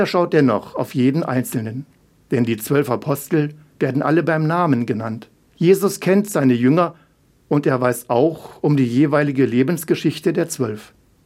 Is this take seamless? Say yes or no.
yes